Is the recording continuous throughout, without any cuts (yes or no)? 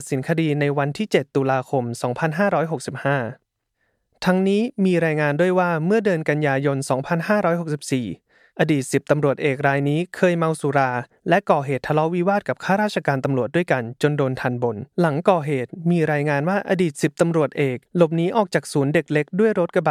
no